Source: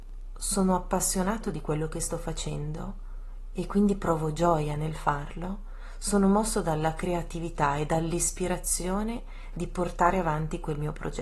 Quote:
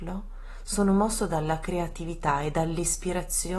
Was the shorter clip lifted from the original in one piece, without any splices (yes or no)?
yes